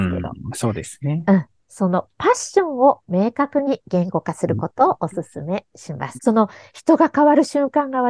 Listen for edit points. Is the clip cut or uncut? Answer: cut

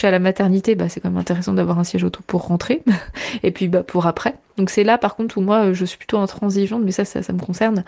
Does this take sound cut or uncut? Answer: uncut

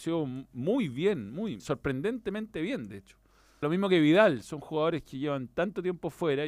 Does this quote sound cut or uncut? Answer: cut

